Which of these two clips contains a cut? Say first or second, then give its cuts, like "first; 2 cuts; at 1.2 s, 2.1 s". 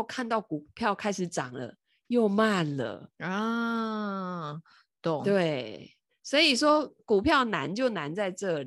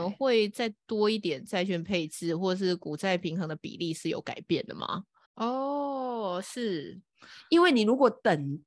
second; 1 cut; at 5.3 s